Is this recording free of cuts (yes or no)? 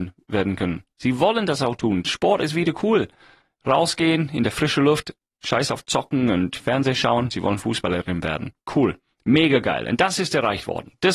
yes